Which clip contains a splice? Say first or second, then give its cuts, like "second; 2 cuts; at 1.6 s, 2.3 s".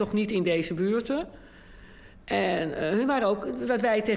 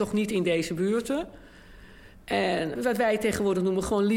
second; 1 cut; at 2.8 s